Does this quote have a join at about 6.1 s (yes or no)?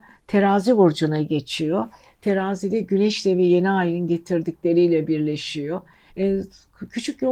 yes